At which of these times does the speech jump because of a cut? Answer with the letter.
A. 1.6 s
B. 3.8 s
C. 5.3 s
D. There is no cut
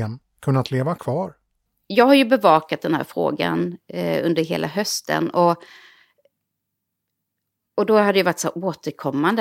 D